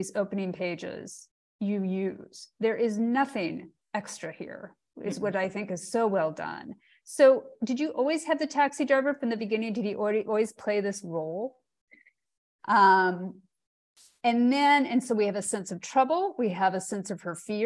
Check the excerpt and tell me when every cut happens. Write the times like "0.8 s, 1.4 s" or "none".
9.4 s, 12.6 s